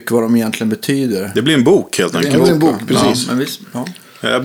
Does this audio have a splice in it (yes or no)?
no